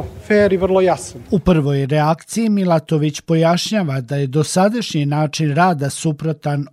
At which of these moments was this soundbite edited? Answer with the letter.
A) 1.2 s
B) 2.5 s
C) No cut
A